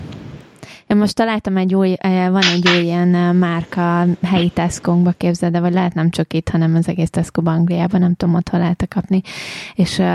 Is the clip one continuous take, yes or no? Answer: yes